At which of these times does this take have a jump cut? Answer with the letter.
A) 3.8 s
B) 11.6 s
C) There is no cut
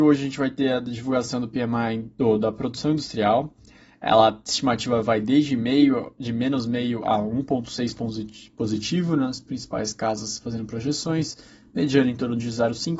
C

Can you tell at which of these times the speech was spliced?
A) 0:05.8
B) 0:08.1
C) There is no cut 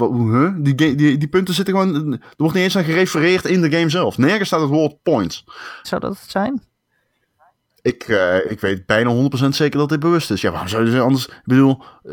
A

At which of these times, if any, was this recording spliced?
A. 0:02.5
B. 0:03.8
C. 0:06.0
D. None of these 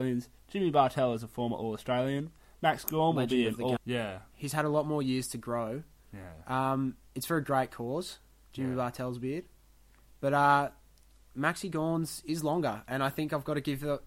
B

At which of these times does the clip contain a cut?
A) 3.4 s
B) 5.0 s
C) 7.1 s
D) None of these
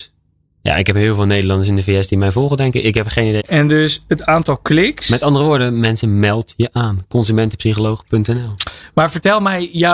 A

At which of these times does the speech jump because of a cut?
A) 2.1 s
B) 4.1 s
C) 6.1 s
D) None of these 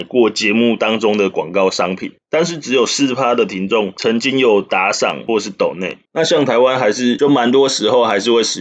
C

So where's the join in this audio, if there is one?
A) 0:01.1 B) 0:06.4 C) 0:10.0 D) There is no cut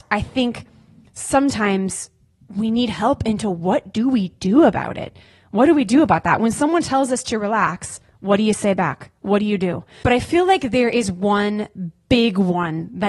C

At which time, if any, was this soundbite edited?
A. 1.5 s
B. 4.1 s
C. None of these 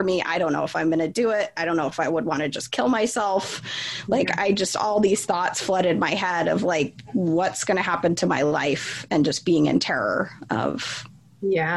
C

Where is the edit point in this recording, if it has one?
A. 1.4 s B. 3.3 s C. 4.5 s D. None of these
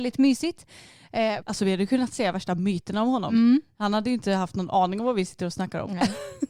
A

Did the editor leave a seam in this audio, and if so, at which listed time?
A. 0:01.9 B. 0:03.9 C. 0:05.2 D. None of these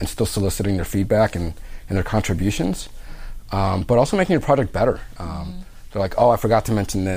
C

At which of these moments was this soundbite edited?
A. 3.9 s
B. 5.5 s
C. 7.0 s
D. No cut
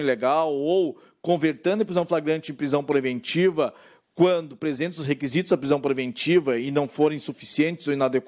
D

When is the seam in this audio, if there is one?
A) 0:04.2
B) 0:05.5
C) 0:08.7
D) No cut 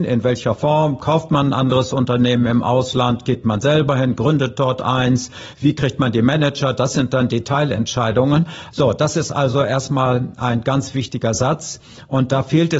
C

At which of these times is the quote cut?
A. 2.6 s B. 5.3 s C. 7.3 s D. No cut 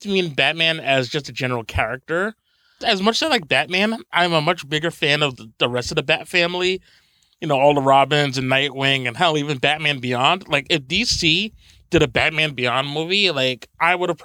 B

